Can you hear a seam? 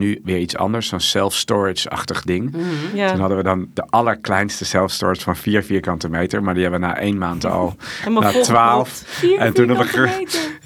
no; 0 cuts

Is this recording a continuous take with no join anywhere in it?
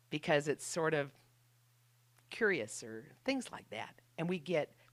yes; 0 cuts

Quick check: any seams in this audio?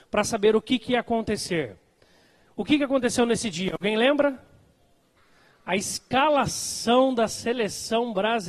no; 0 cuts

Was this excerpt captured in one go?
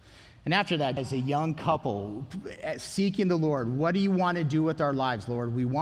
no; 1 cut; at 1.0 s

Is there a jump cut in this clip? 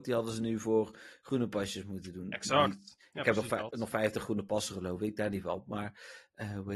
no; 0 cuts

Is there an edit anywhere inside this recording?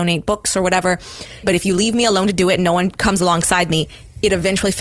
yes; 1 cut; at 1.4 s

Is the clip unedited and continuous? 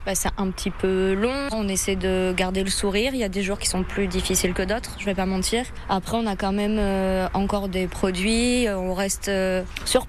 no; 1 cut; at 1.5 s

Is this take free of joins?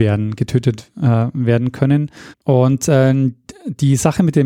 no; 1 cut; at 2.3 s

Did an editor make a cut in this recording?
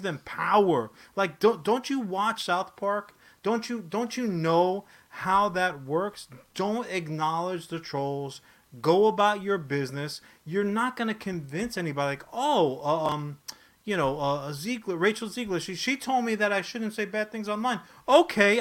no; 0 cuts

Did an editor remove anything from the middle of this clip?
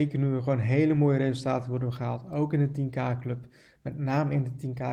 no; 0 cuts

